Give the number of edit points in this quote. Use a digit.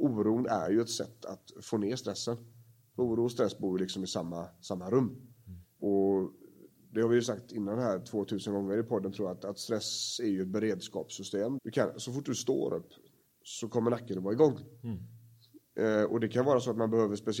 1